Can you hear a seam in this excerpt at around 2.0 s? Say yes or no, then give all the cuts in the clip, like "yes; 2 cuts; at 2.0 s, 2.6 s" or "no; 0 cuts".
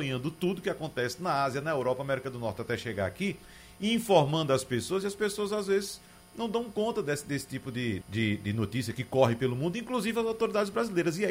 no; 1 cut; at 8.0 s